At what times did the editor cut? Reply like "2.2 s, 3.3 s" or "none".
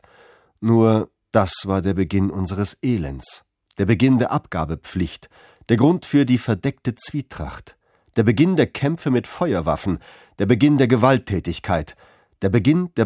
5.6 s